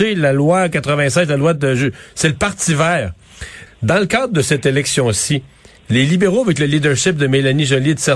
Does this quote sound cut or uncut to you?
cut